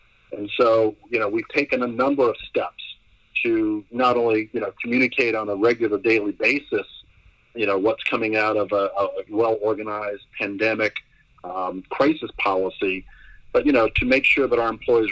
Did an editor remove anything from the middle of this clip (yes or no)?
yes